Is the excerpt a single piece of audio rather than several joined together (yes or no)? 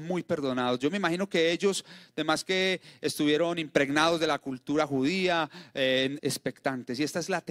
no